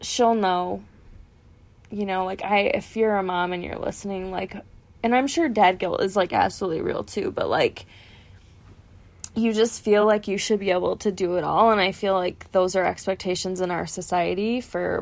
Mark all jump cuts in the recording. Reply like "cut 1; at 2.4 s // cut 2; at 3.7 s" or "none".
none